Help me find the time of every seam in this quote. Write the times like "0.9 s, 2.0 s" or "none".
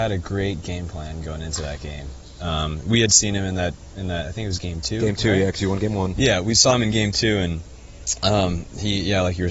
none